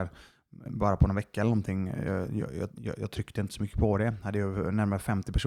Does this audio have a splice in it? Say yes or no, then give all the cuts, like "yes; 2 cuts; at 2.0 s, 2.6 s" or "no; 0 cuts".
no; 0 cuts